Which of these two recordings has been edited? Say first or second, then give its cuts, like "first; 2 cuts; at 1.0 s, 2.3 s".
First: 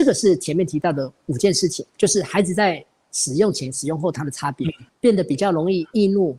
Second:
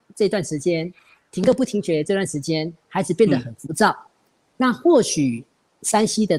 first; 2 cuts; at 1.9 s, 4.9 s